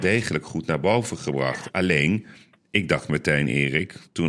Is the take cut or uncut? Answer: uncut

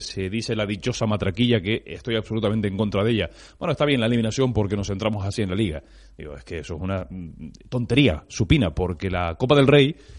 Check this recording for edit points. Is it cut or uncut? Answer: uncut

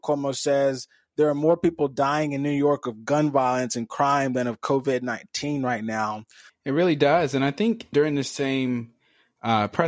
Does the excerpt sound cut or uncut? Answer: cut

